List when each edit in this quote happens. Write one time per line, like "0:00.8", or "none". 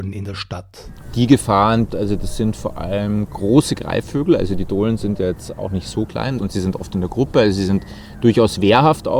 0:01.9
0:06.4